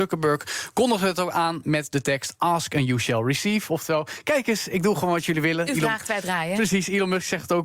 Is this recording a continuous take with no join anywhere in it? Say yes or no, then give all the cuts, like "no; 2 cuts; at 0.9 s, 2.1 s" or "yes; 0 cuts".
yes; 0 cuts